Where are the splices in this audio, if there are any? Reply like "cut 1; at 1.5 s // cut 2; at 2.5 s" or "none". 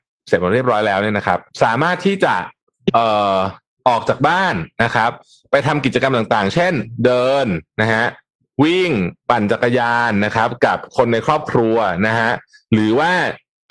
cut 1; at 1.5 s